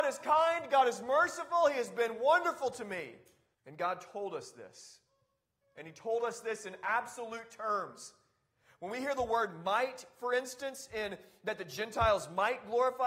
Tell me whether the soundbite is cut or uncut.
cut